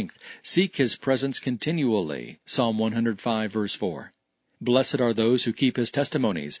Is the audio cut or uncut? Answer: uncut